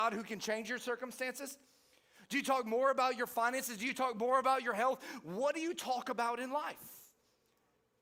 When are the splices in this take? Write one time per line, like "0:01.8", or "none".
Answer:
none